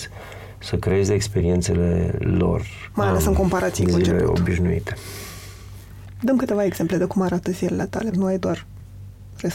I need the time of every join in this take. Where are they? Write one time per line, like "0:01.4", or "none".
0:02.9
0:08.1